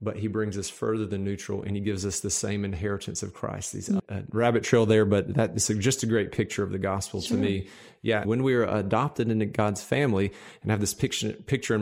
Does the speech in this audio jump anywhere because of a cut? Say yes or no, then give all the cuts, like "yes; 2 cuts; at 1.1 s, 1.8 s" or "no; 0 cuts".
yes; 2 cuts; at 4.0 s, 8.2 s